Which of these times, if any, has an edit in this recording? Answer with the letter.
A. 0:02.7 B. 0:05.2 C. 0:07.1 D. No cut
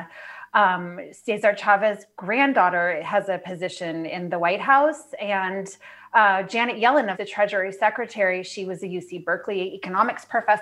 C